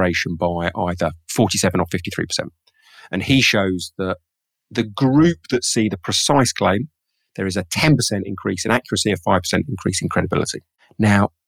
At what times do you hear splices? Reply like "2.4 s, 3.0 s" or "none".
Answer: none